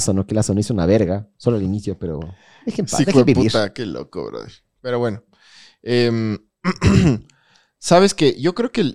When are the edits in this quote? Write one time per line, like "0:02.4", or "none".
none